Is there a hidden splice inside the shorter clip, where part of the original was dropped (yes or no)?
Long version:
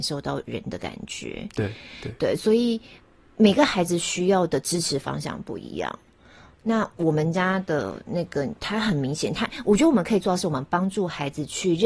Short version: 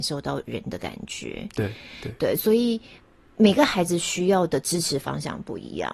no